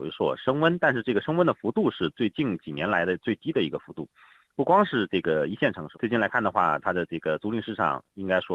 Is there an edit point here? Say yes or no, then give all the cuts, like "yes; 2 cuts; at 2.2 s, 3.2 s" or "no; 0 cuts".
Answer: yes; 1 cut; at 5.9 s